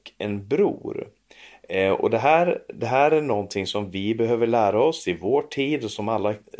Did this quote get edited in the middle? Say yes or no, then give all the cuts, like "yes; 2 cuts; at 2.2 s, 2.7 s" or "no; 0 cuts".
no; 0 cuts